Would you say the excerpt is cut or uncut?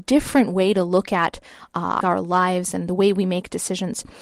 cut